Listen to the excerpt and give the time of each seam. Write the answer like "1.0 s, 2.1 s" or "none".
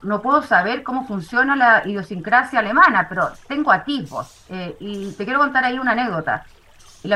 none